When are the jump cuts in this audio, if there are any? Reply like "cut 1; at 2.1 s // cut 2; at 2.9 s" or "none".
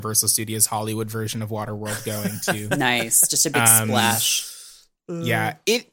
none